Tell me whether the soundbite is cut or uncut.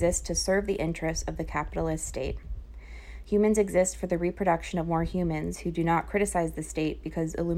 uncut